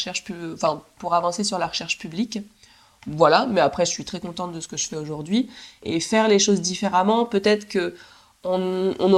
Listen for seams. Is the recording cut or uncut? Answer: uncut